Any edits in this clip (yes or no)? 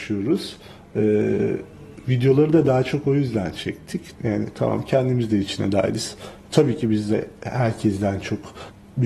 yes